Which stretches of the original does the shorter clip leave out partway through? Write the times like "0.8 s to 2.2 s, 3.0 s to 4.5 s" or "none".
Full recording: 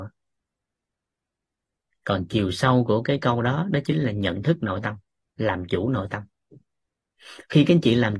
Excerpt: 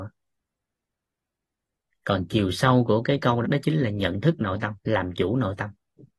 3.4 s to 3.6 s, 5.0 s to 5.3 s